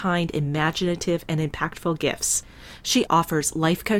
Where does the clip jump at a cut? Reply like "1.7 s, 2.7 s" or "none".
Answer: 3.1 s